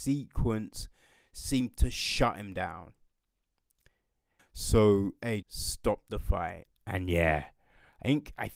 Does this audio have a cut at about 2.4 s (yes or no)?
no